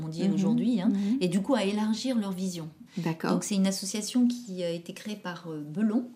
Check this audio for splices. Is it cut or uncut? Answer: cut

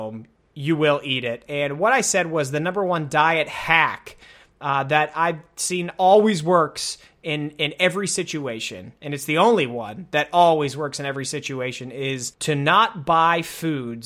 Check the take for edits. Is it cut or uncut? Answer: cut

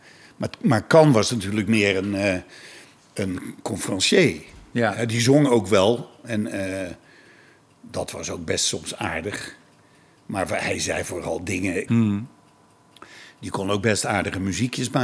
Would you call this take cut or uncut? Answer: cut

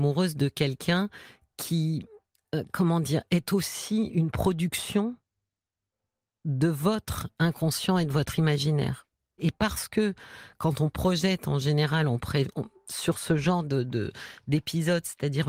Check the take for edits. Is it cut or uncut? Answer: cut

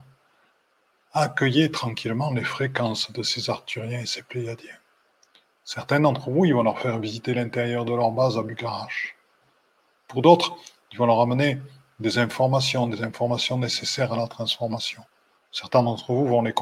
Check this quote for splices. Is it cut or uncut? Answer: uncut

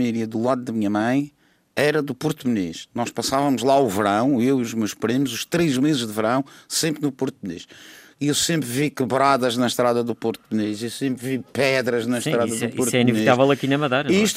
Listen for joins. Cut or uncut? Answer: uncut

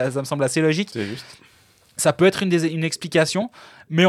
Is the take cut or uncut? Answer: uncut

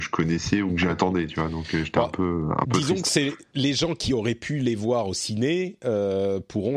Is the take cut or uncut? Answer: uncut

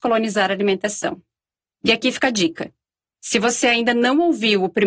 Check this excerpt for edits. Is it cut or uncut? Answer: uncut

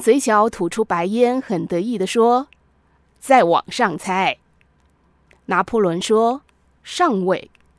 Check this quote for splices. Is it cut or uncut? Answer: uncut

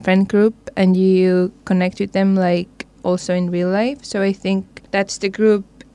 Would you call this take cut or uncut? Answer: uncut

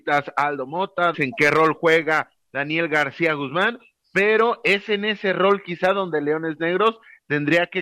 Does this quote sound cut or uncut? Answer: cut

